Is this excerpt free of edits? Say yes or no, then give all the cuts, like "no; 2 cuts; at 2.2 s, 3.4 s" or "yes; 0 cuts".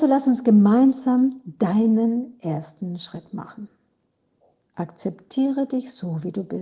yes; 0 cuts